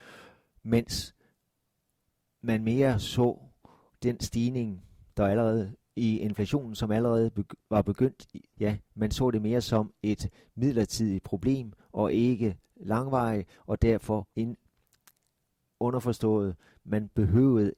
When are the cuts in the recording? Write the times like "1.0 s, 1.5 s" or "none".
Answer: 8.5 s, 14.3 s